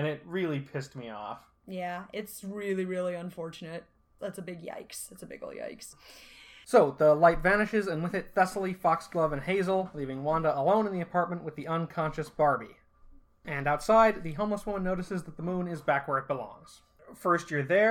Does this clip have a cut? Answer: no; 0 cuts

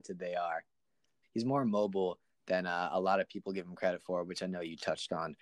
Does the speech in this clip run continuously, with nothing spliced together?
no; 1 cut; at 1.2 s

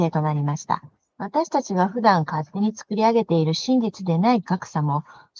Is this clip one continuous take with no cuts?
no; 1 cut; at 1.1 s

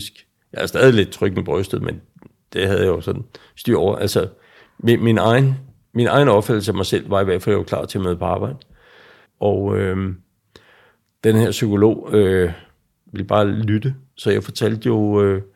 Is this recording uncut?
no; 2 cuts; at 9.2 s, 13.0 s

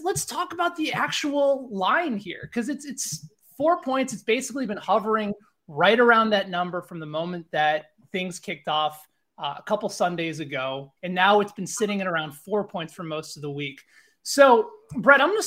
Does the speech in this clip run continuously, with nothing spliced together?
no; 1 cut; at 11.0 s

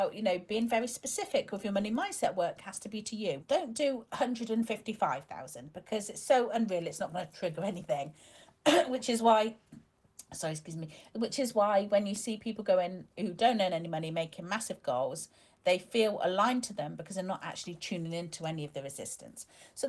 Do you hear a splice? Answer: yes; 1 cut; at 3.4 s

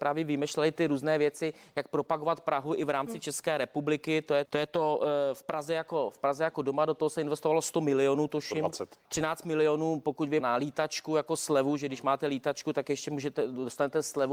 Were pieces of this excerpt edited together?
yes; 3 cuts; at 4.5 s, 9.0 s, 10.4 s

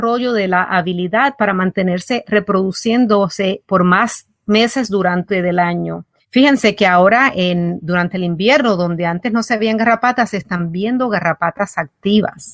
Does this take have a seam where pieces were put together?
no; 0 cuts

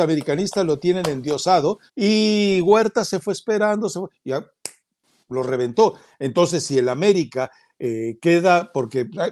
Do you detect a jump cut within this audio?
yes; 1 cut; at 1.9 s

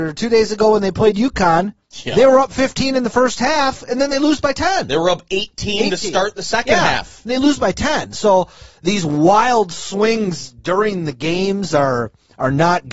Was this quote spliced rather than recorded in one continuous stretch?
no; 0 cuts

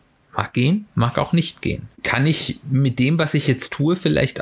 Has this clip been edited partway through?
yes; 1 cut; at 1.9 s

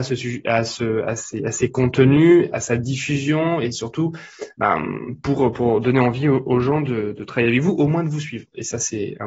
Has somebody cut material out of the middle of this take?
no; 0 cuts

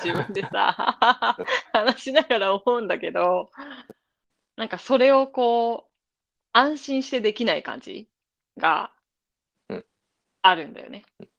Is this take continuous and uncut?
yes; 0 cuts

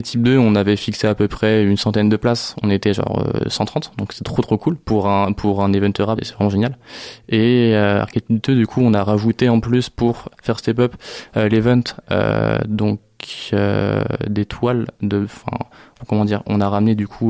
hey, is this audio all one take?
no; 1 cut; at 6.2 s

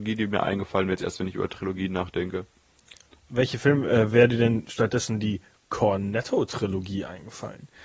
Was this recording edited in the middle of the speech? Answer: no; 0 cuts

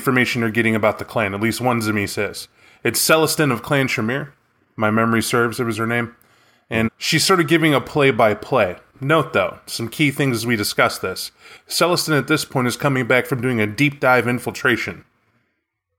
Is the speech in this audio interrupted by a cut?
yes; 1 cut; at 6.8 s

